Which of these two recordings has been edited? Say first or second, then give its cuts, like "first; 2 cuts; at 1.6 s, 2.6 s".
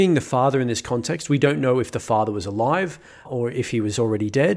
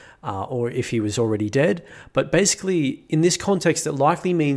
first; 1 cut; at 3.3 s